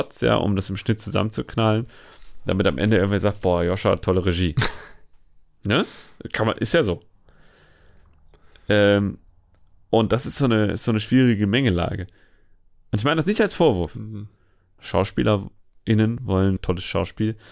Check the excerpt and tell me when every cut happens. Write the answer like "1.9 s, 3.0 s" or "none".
14.8 s, 16.6 s